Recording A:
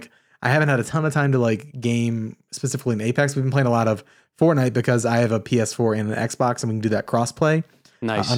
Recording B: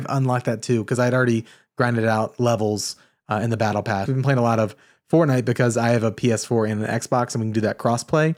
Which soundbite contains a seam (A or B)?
B